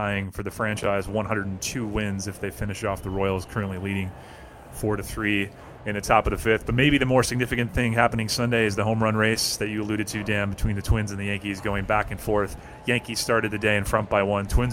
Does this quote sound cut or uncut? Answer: uncut